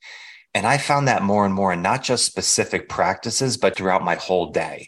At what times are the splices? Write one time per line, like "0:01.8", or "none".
0:03.7